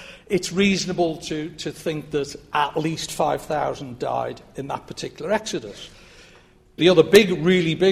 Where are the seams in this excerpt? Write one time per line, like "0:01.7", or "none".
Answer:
0:06.8

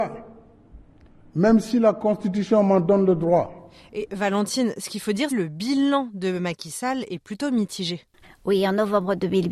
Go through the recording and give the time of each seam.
0:05.3
0:08.2

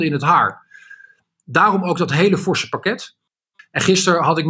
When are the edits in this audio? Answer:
0:03.6

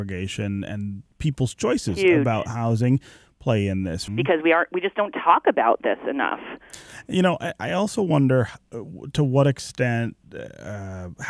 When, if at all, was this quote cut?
0:04.1

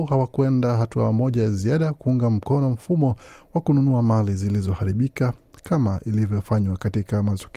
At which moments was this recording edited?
none

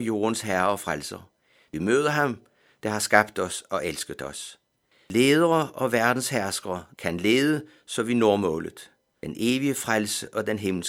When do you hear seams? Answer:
0:06.9

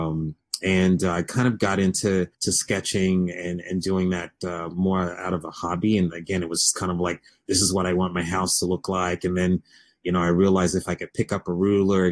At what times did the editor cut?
0:02.3

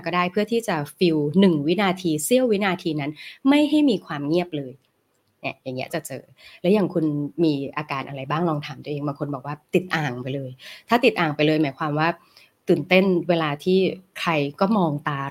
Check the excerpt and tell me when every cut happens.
0:05.9

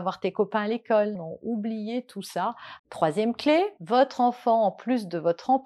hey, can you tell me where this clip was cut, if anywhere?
0:01.2
0:02.8

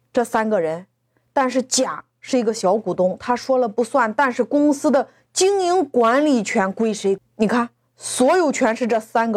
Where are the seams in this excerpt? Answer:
0:07.2

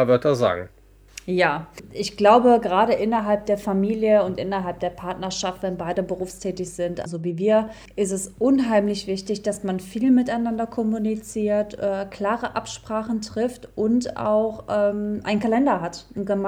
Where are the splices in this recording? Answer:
0:07.1

